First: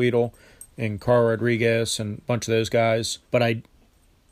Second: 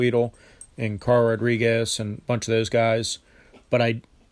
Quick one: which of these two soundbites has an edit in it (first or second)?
first